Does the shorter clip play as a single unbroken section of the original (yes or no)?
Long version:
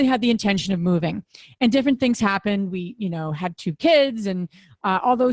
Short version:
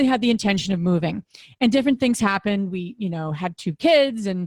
yes